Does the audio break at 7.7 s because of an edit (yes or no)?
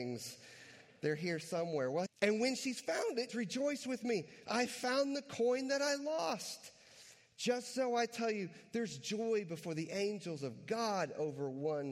no